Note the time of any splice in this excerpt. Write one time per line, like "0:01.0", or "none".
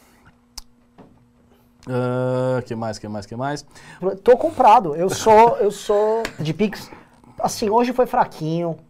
0:04.0
0:06.4